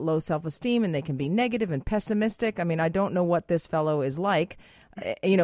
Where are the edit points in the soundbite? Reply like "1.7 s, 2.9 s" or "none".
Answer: none